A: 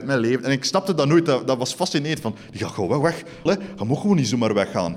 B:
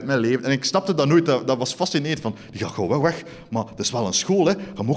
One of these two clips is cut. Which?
A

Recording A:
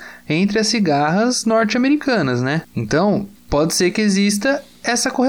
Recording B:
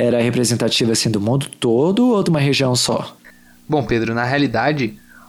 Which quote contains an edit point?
A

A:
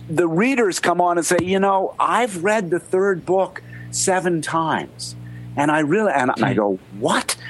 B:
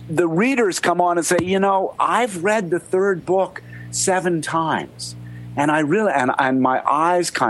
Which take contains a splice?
A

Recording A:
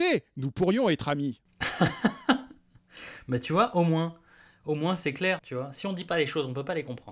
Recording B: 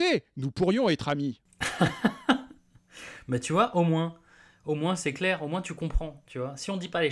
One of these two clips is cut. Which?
A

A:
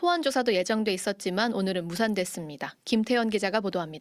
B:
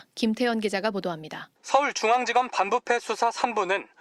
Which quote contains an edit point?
B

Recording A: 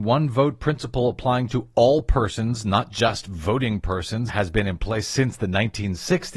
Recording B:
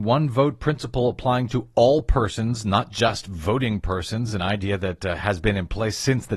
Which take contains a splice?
A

